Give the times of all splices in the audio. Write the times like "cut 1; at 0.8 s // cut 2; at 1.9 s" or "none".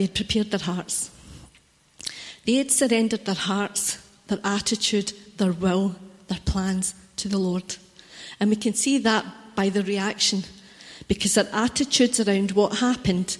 none